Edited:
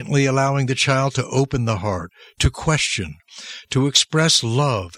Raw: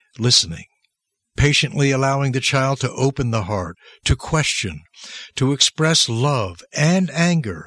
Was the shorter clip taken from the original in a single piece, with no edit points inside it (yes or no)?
yes